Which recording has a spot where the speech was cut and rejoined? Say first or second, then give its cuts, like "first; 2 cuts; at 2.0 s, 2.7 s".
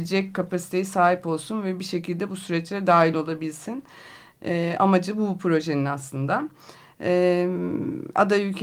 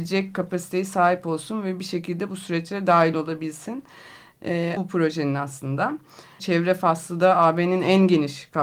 second; 2 cuts; at 4.8 s, 6.4 s